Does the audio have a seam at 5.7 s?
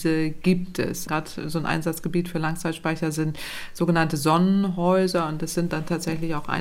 yes; 2 cuts; at 1.1 s, 5.7 s

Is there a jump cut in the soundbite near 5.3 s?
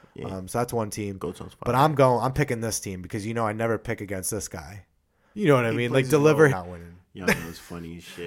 yes; 2 cuts; at 5.3 s, 6.5 s

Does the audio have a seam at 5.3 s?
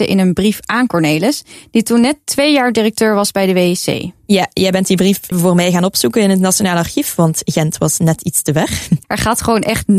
yes; 2 cuts; at 5.3 s, 9.0 s

